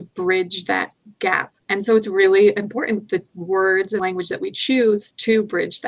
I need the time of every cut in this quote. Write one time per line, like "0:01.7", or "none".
0:01.6